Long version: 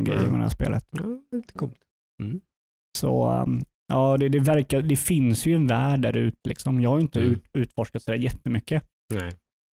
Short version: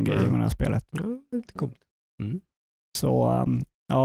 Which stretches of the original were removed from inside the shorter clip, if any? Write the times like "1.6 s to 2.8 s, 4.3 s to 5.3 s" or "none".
none